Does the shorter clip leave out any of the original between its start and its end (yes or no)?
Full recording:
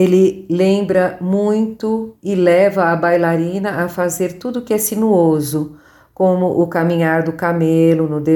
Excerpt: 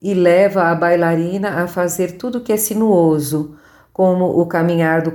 no